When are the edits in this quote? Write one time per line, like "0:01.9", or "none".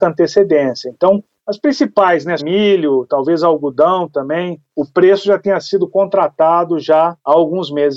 0:02.4